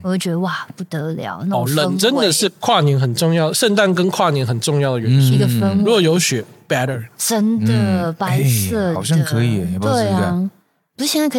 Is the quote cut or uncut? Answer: uncut